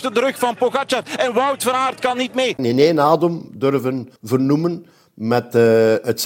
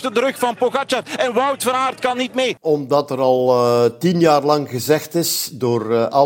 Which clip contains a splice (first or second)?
first